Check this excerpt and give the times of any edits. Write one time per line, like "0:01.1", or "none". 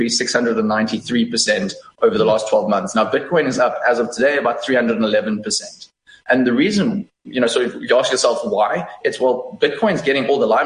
0:06.2